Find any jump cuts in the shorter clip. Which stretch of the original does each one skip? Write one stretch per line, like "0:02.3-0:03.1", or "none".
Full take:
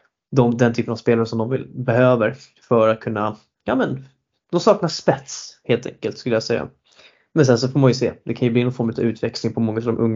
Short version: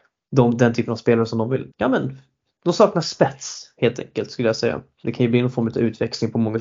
0:01.7-0:03.6
0:06.9-0:08.2